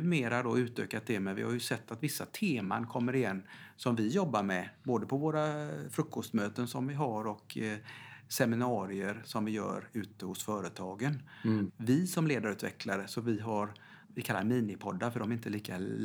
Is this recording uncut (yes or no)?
no